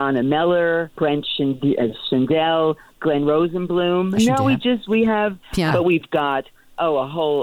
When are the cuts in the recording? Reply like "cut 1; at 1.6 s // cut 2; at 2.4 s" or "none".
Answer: cut 1; at 4.2 s // cut 2; at 5.7 s